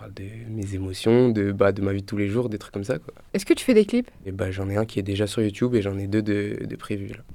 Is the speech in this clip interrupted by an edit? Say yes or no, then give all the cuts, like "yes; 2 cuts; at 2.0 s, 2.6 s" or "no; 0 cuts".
no; 0 cuts